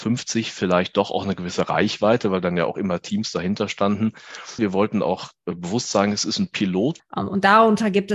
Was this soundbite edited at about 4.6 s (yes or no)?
yes